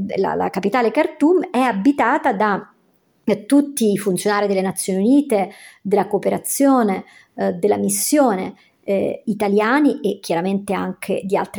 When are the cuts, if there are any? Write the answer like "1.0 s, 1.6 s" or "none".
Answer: none